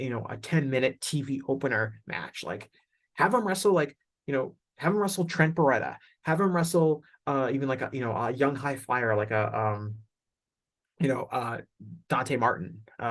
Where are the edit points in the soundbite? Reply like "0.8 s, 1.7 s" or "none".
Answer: 12.0 s